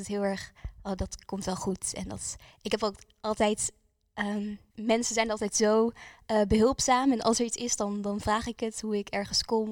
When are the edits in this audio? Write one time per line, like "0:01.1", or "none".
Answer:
0:04.7